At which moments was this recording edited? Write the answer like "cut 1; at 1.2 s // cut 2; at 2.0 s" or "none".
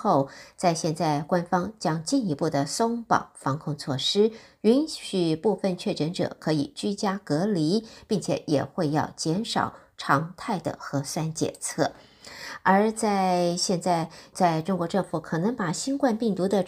cut 1; at 14.3 s